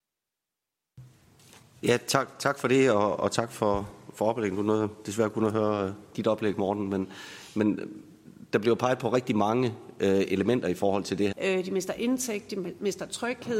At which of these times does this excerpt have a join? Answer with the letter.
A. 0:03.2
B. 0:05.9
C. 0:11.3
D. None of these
C